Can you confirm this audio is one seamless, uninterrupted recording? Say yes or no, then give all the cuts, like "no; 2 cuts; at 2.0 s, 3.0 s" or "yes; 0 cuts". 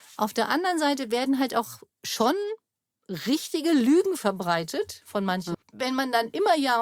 no; 1 cut; at 5.5 s